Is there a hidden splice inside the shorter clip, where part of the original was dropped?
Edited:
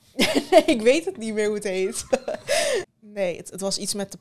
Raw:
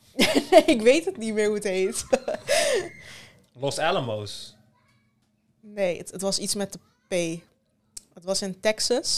yes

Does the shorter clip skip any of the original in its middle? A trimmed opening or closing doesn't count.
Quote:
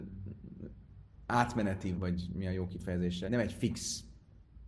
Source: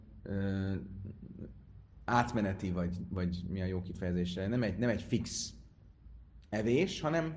yes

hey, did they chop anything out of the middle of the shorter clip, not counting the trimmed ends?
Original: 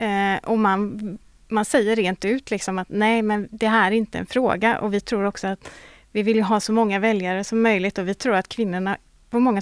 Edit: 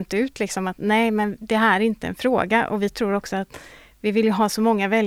no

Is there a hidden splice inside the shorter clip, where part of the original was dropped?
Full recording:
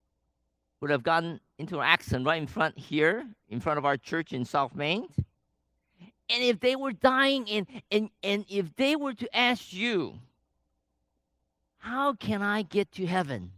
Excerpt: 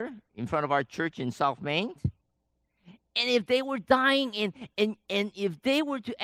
no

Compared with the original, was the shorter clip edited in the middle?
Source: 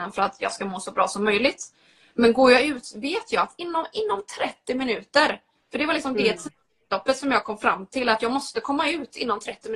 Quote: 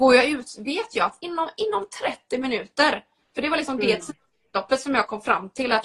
no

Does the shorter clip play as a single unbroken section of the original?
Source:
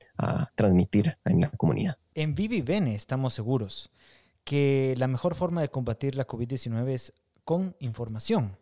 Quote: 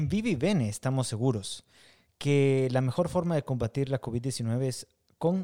yes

